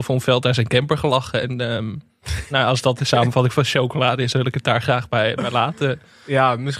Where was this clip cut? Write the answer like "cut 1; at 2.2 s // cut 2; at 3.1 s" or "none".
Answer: none